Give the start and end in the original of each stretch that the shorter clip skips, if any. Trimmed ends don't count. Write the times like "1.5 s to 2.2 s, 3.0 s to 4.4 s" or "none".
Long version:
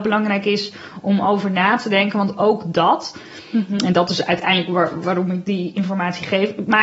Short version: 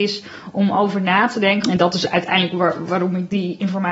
2.1 s to 3.8 s